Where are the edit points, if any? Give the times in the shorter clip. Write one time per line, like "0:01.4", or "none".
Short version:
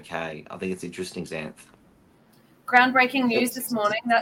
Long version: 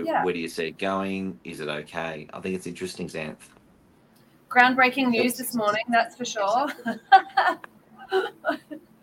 none